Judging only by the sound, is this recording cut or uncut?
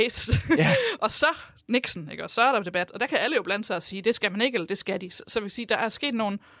uncut